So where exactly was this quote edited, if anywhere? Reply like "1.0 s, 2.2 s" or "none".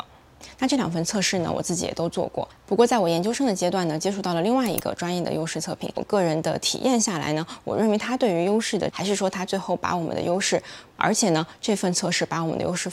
8.9 s, 11.0 s